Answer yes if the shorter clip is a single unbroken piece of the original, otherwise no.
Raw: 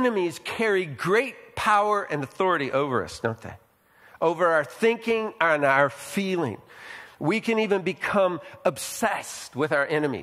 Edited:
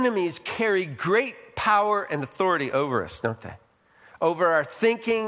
yes